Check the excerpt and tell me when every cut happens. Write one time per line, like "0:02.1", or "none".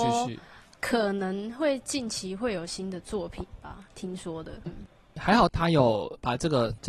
0:04.7